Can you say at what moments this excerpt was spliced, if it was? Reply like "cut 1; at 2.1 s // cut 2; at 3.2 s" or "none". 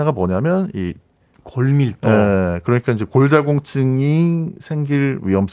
cut 1; at 1.3 s